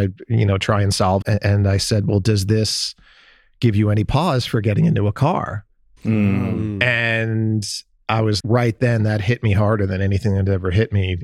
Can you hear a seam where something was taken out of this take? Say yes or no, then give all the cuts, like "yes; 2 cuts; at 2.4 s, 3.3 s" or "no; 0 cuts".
yes; 3 cuts; at 1.2 s, 6.0 s, 8.4 s